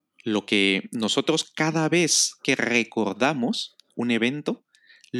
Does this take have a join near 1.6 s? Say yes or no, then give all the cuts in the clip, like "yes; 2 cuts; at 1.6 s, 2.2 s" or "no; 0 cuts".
no; 0 cuts